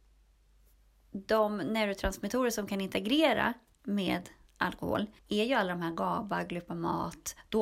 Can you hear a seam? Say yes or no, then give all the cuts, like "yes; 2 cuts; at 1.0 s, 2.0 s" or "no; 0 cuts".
yes; 1 cut; at 5.2 s